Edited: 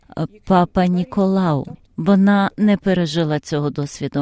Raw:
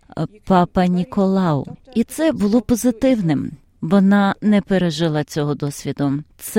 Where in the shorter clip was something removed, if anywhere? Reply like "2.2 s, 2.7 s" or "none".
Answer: 1.8 s